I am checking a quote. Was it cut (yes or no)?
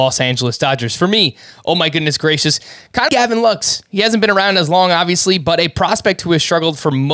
yes